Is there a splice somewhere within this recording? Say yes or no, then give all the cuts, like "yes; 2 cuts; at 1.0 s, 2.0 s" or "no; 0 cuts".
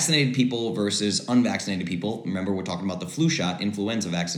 no; 0 cuts